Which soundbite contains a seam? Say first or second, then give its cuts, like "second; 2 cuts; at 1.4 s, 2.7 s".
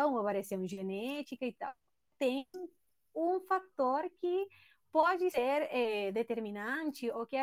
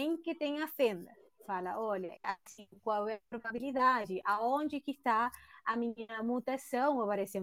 second; 1 cut; at 2.2 s